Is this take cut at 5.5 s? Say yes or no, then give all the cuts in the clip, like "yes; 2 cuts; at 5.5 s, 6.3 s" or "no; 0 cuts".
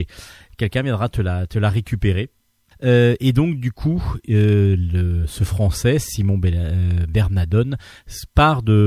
no; 1 cut; at 2.7 s